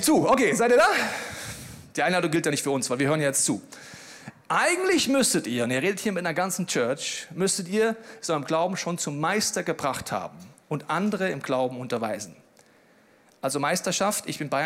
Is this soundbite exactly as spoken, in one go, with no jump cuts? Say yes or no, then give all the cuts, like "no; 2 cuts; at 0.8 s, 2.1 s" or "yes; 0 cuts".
yes; 0 cuts